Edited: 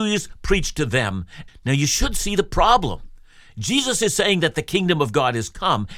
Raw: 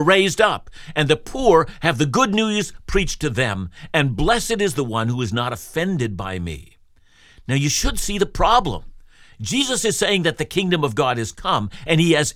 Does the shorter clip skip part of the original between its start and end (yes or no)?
yes